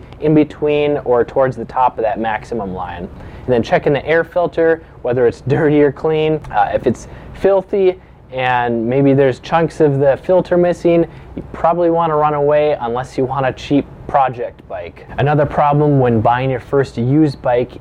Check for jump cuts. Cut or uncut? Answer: uncut